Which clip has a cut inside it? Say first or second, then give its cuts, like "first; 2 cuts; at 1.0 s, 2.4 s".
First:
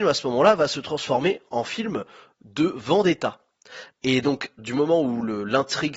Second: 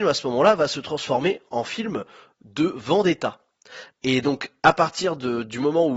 first; 1 cut; at 4.6 s